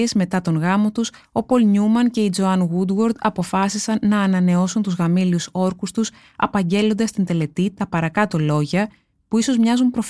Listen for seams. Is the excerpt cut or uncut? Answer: uncut